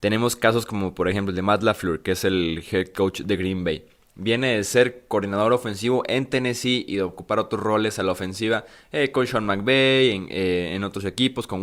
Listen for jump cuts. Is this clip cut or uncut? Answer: uncut